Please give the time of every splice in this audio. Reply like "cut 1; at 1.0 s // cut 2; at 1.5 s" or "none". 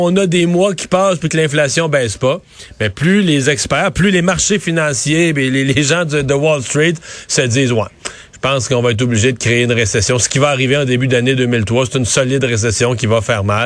none